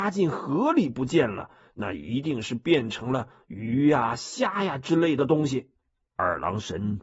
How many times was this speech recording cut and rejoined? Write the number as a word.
one